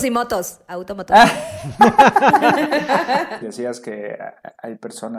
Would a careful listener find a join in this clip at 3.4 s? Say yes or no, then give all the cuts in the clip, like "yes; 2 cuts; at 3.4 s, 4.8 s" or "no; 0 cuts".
yes; 1 cut; at 3.4 s